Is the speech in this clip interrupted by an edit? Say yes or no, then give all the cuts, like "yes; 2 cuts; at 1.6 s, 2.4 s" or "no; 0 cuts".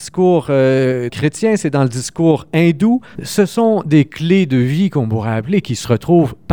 yes; 2 cuts; at 1.1 s, 3.2 s